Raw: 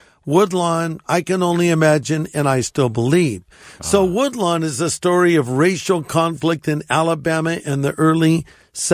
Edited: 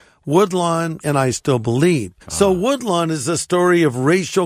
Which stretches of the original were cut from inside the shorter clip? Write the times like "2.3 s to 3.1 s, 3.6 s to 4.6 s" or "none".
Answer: 1.0 s to 2.3 s, 3.5 s to 3.7 s